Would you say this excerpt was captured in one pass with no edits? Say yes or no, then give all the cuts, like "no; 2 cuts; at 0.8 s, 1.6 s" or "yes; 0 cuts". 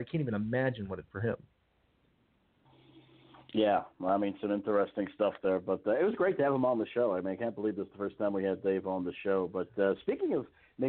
no; 1 cut; at 1.1 s